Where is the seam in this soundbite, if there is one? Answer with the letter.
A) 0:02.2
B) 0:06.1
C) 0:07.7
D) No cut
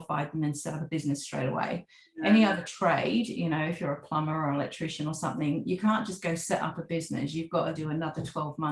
C